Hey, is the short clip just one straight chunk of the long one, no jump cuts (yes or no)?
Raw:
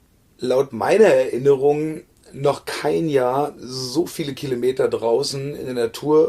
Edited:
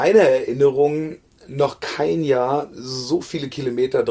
yes